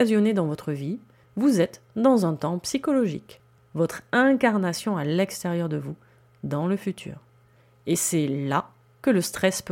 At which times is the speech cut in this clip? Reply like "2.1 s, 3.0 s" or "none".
3.6 s